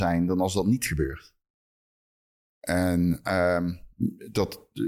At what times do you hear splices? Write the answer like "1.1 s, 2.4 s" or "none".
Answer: 2.5 s